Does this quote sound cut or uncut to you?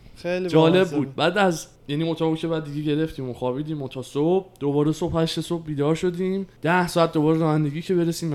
cut